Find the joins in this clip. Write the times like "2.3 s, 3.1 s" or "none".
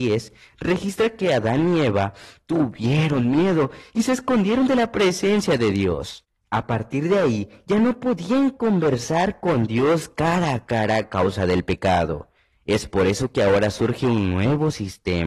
none